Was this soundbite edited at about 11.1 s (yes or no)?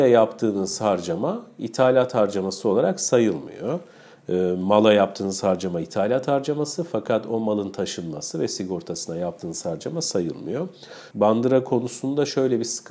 yes